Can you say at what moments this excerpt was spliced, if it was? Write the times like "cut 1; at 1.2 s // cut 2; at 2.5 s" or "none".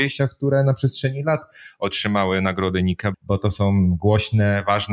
cut 1; at 3.1 s